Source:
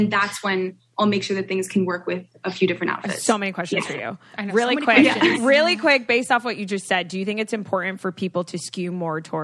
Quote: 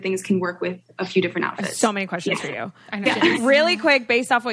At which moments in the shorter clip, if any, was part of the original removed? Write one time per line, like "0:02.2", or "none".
0:03.1